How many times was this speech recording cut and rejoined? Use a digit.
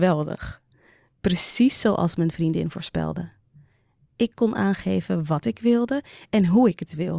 0